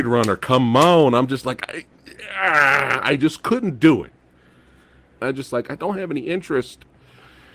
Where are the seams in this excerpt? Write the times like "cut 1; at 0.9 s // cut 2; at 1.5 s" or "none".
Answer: cut 1; at 5.2 s

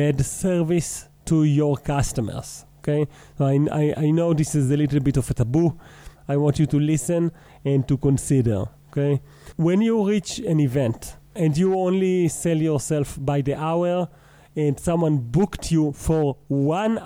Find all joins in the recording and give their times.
cut 1; at 6.1 s

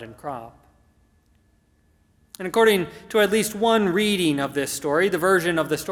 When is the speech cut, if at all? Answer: none

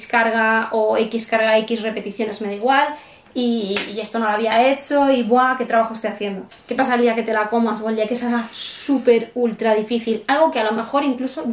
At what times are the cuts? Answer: cut 1; at 6.5 s

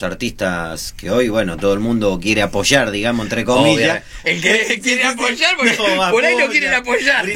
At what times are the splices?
cut 1; at 4.2 s // cut 2; at 5.8 s

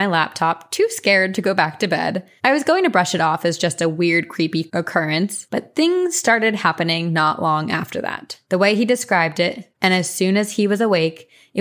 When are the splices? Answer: cut 1; at 2.4 s // cut 2; at 8.4 s // cut 3; at 9.7 s

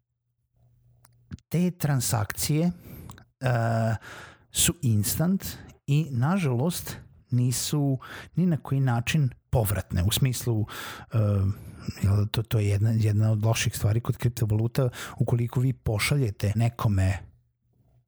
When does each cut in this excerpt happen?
cut 1; at 16.5 s

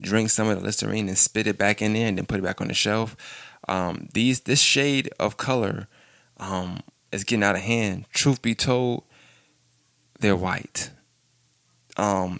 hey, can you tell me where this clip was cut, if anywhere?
none

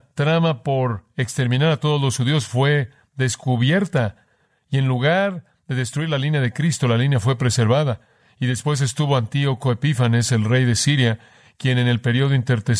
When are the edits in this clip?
none

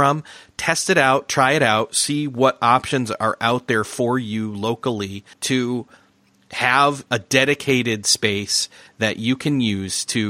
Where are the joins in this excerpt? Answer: cut 1; at 5.3 s // cut 2; at 7.1 s

